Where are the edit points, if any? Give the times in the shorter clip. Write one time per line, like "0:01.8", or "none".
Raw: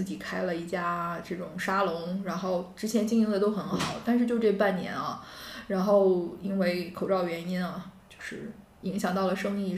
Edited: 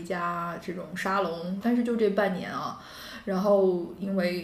0:01.6